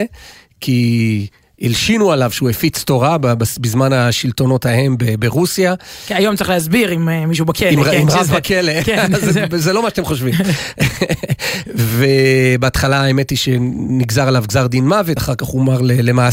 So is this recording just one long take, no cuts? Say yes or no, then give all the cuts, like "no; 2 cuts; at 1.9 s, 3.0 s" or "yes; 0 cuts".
yes; 0 cuts